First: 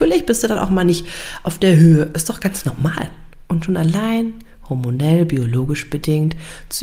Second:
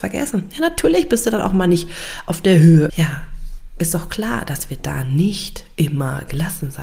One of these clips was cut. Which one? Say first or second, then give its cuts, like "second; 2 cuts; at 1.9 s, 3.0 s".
second; 1 cut; at 2.9 s